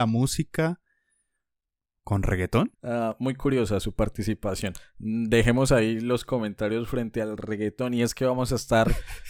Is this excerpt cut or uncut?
cut